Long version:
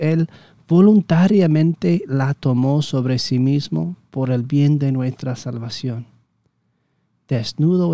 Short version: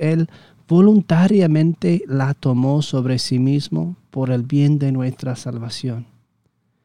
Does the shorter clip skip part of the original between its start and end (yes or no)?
no